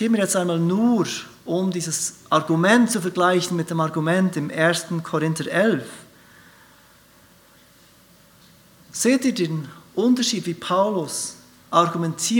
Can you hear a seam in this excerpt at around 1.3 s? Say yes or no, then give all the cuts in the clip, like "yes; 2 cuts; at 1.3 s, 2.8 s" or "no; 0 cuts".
no; 0 cuts